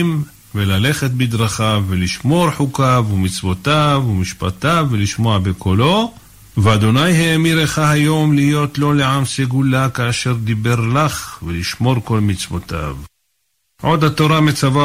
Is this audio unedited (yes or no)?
yes